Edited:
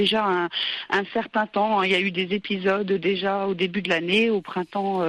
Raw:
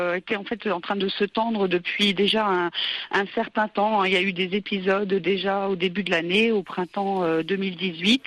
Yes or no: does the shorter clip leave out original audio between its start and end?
no